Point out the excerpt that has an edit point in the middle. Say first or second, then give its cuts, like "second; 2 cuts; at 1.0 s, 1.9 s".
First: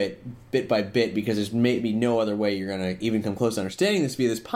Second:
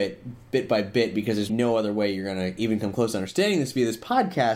second; 1 cut; at 1.5 s